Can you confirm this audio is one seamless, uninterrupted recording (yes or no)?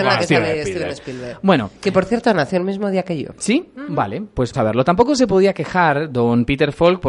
no